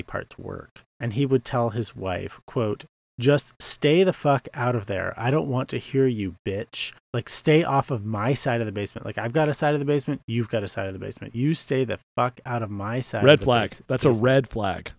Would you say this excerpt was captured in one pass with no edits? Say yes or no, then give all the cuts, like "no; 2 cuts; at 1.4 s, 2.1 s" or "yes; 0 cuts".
yes; 0 cuts